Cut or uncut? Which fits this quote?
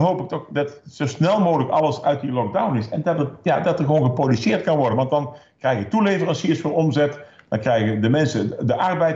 uncut